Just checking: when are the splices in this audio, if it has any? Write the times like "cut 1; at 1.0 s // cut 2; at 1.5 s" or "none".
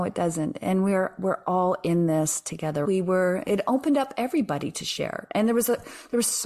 cut 1; at 2.8 s